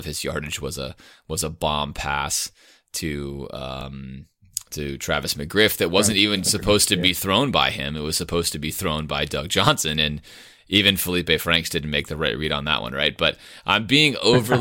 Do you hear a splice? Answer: no; 0 cuts

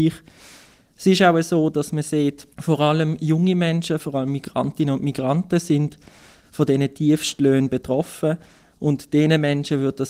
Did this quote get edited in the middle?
yes; 2 cuts; at 2.5 s, 4.0 s

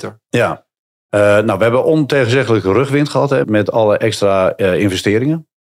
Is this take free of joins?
no; 1 cut; at 3.4 s

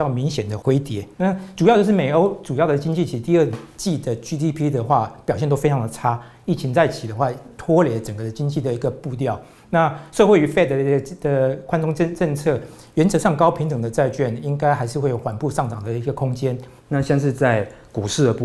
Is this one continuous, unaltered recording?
no; 2 cuts; at 1.1 s, 16.8 s

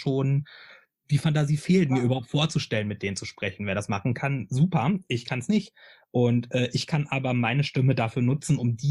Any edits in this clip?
no; 0 cuts

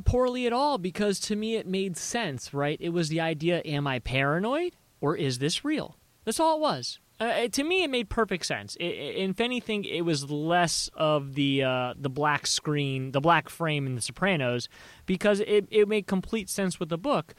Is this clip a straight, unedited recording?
yes; 0 cuts

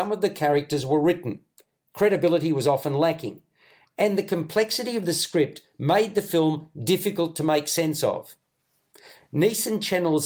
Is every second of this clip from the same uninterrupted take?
yes; 0 cuts

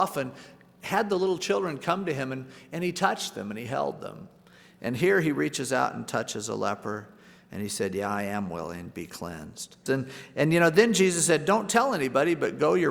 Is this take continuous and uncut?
no; 1 cut; at 9.9 s

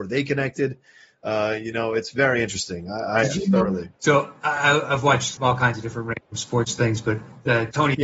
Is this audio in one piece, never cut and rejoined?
no; 2 cuts; at 4.0 s, 5.4 s

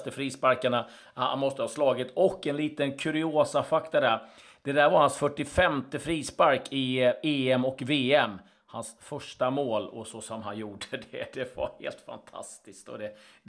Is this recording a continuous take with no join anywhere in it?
yes; 0 cuts

